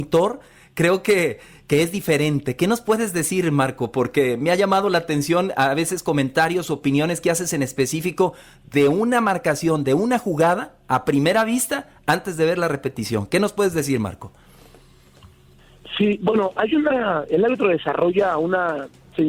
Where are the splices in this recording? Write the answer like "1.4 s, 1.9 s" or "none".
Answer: none